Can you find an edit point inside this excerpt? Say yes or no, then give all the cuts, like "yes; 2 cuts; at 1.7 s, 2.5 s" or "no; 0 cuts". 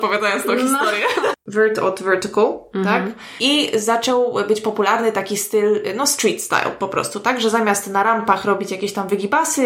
yes; 1 cut; at 1.3 s